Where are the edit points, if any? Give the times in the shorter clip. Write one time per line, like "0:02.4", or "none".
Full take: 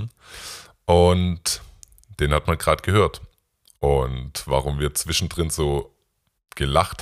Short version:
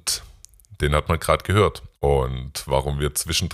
0:01.9

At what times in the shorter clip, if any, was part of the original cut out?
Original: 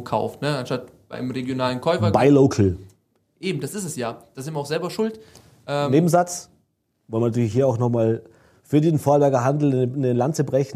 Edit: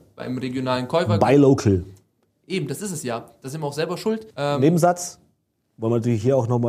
0:04.3

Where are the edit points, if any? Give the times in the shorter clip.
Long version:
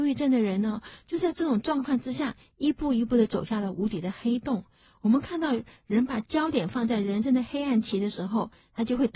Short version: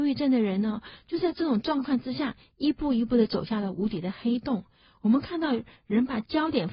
none

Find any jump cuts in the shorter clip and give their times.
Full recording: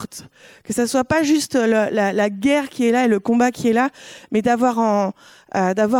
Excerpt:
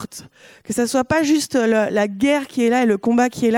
0:01.9

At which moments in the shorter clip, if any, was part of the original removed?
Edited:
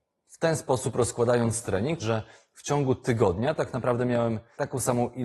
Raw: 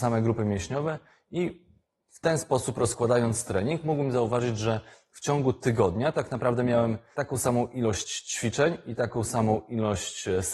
0:02.0

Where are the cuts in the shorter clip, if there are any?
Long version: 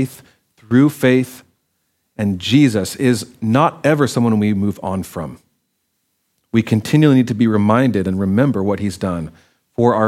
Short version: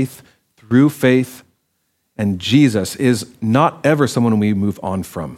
none

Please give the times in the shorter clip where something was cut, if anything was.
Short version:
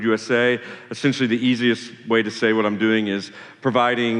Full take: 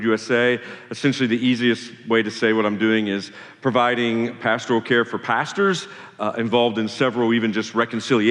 none

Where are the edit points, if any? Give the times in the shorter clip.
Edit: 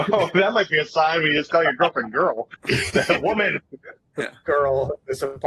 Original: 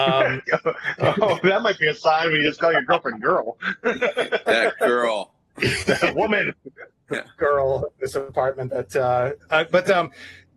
0:02.5

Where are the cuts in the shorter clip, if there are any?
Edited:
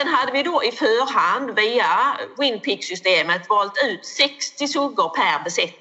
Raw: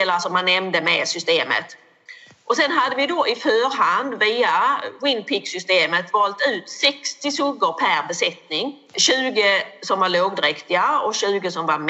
none

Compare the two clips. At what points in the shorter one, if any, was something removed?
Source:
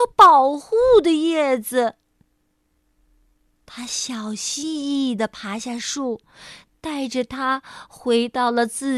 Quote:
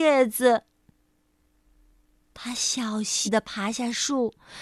0:03.3

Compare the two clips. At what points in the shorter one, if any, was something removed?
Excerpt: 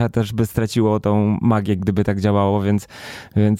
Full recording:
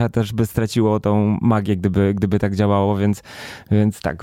0:01.8

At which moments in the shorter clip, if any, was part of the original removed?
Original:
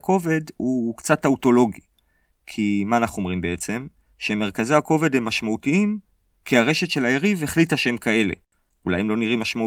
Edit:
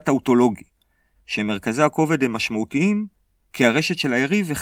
0:01.2

